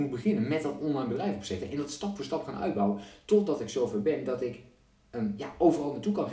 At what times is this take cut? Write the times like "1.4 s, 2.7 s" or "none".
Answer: none